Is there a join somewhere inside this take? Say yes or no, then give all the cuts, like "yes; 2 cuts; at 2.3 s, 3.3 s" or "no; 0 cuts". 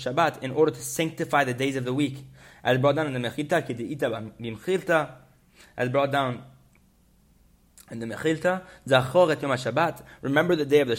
no; 0 cuts